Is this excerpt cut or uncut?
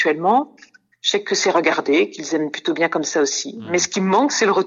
cut